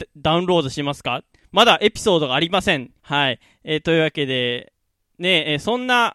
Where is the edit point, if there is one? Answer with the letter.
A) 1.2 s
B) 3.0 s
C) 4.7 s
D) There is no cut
B